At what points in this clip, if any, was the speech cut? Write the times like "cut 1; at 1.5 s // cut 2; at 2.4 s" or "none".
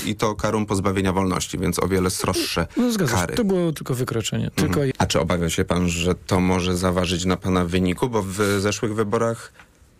cut 1; at 4.9 s